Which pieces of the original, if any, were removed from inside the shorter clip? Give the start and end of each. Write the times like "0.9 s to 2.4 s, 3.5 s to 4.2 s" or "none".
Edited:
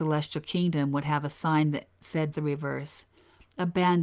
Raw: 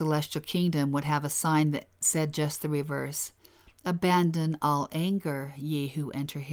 2.3 s to 2.6 s